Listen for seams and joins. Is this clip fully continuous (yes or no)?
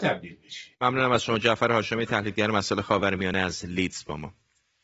yes